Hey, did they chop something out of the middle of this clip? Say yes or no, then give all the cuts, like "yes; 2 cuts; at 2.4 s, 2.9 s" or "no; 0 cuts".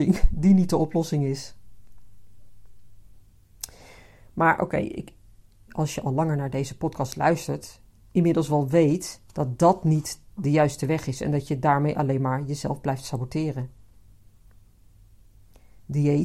yes; 2 cuts; at 5.7 s, 9.3 s